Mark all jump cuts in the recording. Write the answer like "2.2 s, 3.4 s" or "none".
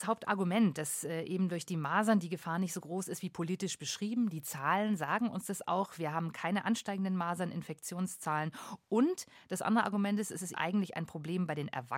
10.5 s

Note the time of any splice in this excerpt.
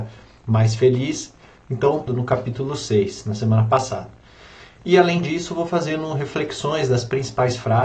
2.1 s, 4.8 s

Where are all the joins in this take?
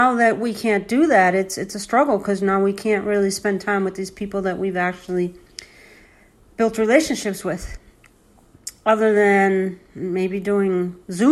none

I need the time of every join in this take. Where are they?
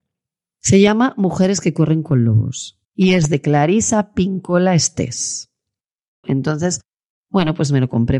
2.8 s, 6.2 s

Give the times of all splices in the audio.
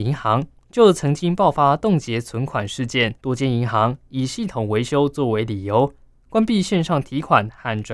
3.2 s

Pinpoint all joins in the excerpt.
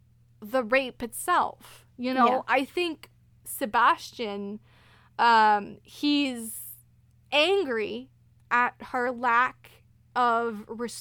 none

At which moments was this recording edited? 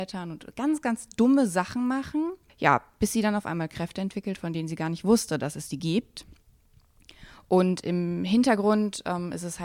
none

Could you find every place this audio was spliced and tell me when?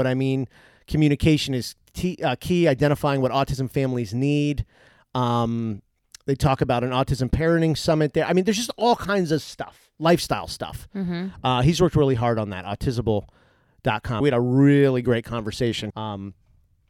14.2 s, 15.9 s

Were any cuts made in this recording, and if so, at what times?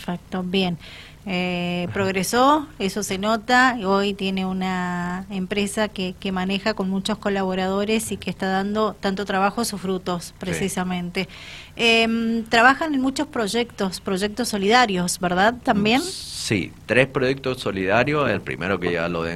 1.2 s

